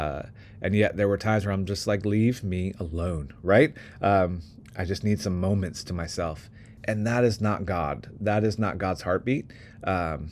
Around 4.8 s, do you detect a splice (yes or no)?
no